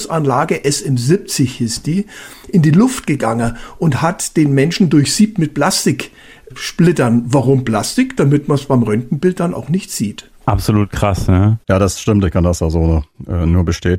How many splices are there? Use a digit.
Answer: 1